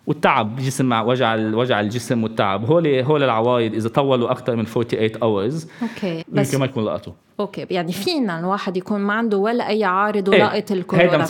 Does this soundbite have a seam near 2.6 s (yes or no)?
no